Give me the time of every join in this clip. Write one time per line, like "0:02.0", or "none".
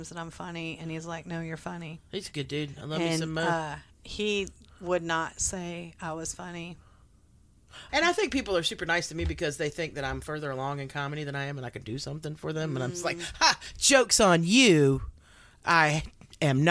0:07.9